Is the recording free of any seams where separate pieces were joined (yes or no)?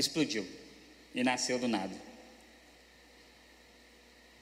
yes